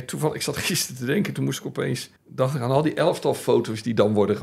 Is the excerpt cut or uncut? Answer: cut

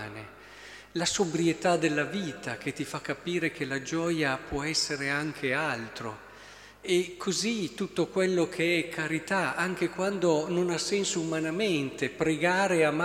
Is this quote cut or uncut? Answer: uncut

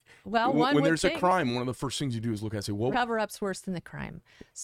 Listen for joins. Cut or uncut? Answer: cut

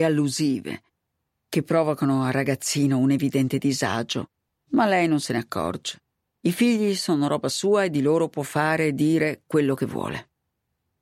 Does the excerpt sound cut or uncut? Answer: cut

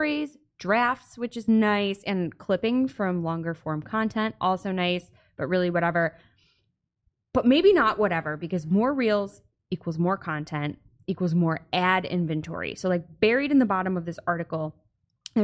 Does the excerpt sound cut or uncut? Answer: uncut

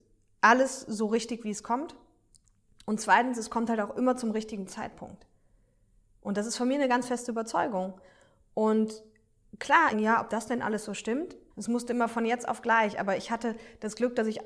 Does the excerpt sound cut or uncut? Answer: cut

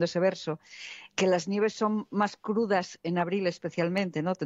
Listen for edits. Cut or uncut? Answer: uncut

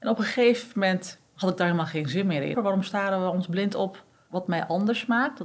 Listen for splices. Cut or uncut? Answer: cut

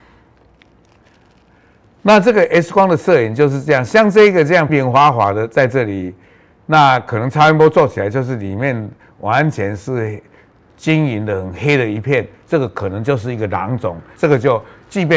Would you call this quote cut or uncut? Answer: cut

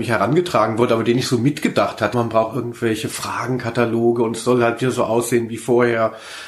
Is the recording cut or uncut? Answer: cut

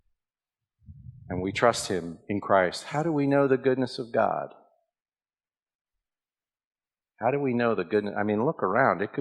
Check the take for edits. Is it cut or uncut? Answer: uncut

